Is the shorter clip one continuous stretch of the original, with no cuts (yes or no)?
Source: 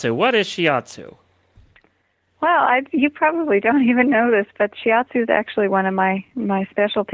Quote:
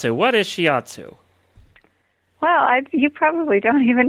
yes